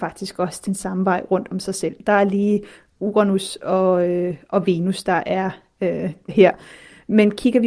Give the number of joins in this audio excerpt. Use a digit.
1